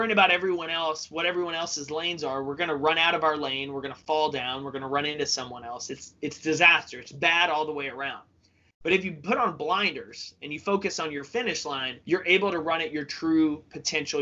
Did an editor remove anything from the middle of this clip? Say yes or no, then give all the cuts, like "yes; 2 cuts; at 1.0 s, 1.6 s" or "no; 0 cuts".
yes; 1 cut; at 12.0 s